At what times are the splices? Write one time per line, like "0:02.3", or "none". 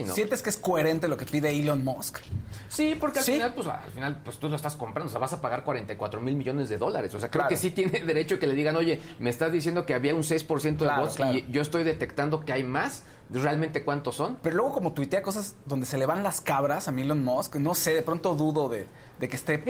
none